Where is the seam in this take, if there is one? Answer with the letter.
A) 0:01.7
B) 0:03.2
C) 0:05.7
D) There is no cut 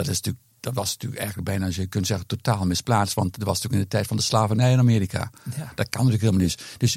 D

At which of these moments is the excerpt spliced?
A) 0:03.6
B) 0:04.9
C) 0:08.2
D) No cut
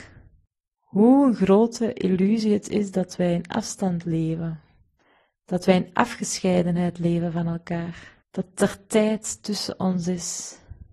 C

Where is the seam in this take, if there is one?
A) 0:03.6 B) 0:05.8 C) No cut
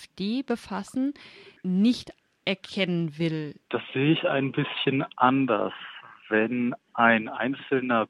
A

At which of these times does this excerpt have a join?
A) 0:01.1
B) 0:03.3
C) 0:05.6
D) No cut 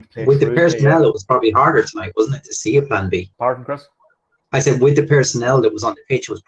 B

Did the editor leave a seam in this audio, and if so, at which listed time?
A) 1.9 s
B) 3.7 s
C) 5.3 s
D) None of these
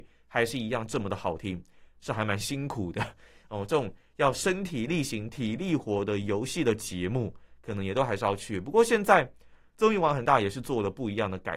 A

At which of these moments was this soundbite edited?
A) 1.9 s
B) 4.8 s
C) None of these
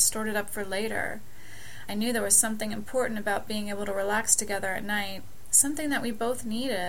A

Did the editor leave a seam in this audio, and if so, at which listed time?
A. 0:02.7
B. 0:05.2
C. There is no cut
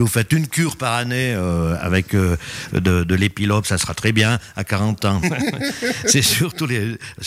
B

